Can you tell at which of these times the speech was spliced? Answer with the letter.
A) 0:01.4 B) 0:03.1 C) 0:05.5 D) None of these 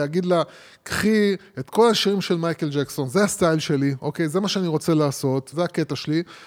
C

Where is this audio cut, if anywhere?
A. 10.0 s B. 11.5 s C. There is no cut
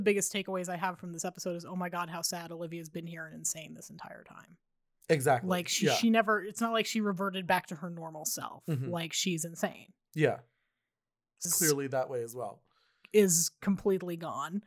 B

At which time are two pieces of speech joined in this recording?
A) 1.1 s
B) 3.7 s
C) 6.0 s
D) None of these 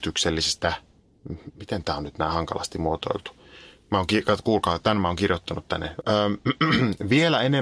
C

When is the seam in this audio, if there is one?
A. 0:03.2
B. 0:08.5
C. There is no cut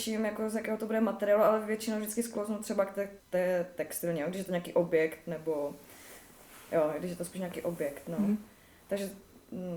A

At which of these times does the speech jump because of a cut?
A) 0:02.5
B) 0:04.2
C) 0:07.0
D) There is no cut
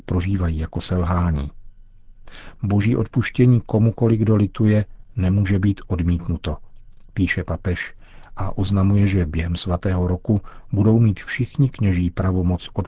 A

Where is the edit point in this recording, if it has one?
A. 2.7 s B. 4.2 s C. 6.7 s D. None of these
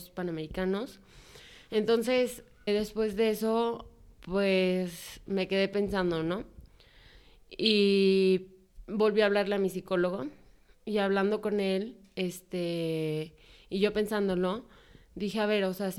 A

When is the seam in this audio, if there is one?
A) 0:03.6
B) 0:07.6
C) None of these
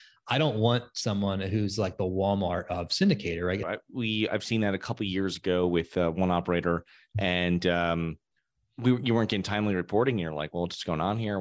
A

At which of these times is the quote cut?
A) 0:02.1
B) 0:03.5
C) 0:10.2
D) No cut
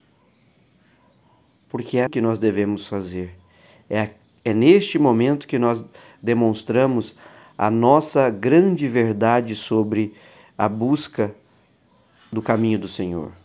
A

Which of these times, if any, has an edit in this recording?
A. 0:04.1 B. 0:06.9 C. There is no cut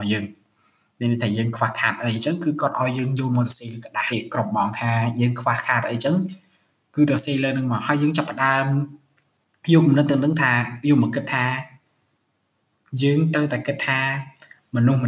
A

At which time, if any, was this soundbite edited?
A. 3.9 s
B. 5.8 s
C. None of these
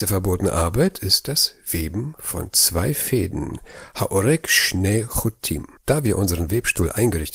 B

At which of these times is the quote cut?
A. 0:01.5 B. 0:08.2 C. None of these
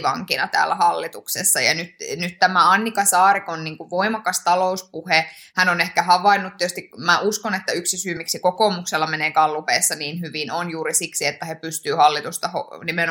C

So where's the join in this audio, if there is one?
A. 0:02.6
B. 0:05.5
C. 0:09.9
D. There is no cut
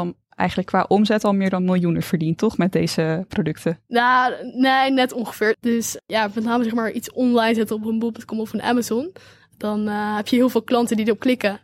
B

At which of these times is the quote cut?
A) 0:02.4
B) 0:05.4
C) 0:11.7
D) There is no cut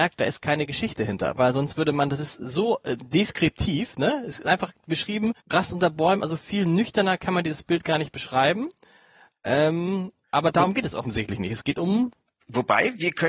B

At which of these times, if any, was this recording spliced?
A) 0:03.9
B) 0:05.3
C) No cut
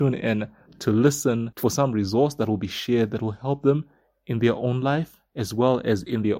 B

